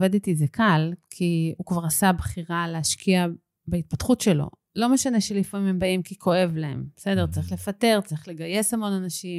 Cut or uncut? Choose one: uncut